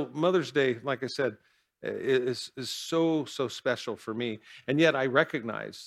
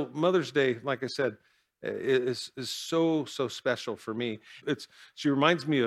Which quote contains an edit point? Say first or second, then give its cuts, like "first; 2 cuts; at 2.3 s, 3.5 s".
second; 1 cut; at 4.6 s